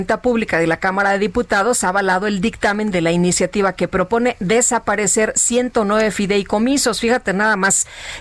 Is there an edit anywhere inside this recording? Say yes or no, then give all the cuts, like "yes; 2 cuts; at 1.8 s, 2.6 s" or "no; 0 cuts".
no; 0 cuts